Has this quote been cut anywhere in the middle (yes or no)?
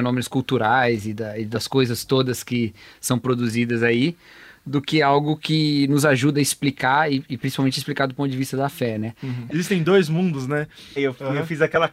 yes